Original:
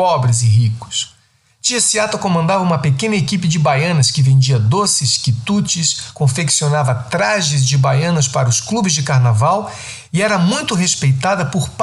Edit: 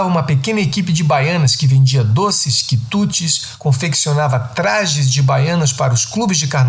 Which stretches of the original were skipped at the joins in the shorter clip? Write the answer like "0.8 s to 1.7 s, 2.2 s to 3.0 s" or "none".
none